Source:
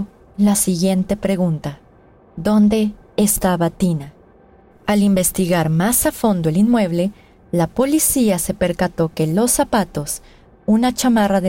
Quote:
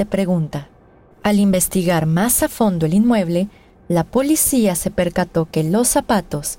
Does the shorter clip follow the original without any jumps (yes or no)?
no